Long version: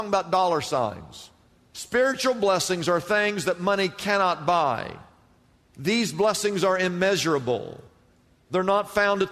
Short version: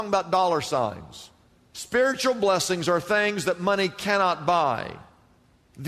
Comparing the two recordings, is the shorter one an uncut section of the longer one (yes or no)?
yes